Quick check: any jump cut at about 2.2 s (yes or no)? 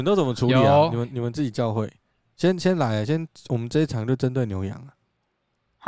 no